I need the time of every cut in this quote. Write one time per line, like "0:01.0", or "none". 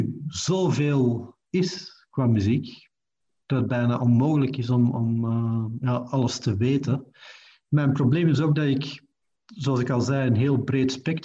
none